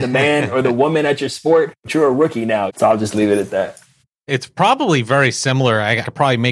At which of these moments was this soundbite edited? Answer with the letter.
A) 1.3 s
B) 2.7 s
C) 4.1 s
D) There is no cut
B